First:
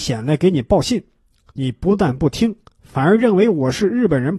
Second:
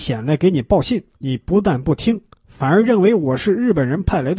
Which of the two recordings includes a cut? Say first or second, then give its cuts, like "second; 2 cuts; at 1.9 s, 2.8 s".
second; 1 cut; at 1.1 s